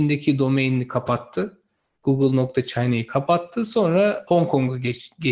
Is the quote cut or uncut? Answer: cut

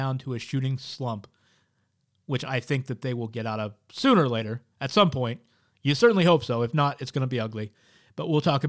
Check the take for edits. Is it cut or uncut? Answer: uncut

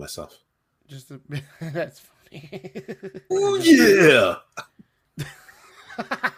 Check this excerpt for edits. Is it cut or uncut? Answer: cut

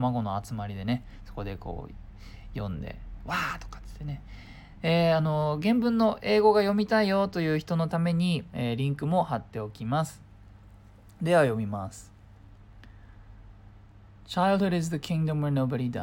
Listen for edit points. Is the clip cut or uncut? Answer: uncut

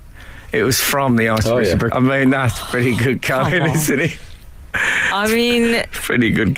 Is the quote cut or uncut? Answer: cut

